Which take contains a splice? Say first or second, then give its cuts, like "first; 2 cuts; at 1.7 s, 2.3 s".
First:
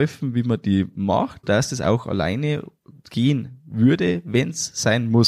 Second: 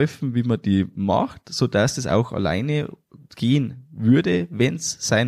first; 1 cut; at 1.4 s